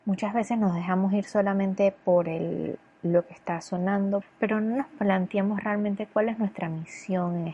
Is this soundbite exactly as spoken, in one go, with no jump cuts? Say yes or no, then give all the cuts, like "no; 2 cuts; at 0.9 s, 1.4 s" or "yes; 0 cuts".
no; 1 cut; at 4.2 s